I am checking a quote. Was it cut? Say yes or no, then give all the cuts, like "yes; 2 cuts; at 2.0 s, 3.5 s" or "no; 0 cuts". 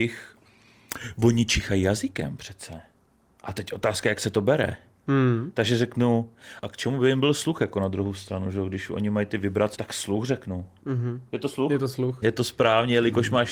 yes; 3 cuts; at 6.6 s, 9.7 s, 12.2 s